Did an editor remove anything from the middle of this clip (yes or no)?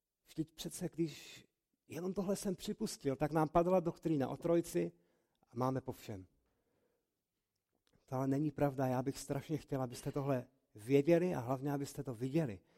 no